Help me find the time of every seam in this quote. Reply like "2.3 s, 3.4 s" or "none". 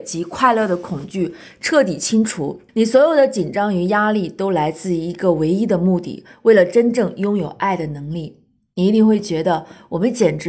2.7 s